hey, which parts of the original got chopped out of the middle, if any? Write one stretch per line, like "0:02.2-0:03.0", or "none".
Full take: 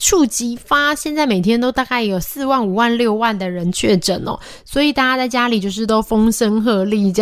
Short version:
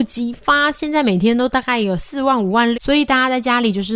0:03.0-0:04.6